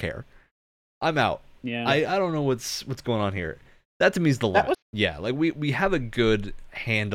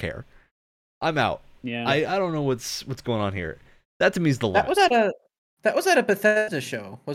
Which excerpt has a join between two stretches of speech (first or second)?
first